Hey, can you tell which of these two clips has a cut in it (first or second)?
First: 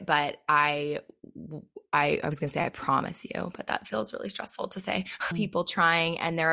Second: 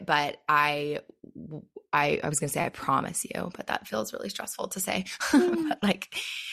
first